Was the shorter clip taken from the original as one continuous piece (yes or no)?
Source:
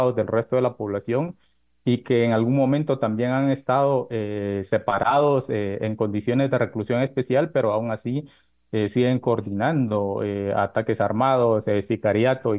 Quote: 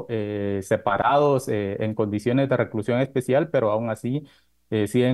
yes